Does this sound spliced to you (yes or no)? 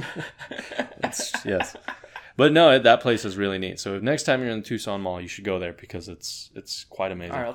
no